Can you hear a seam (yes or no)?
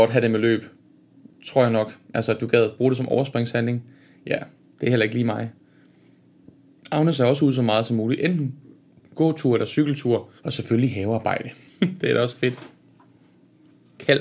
yes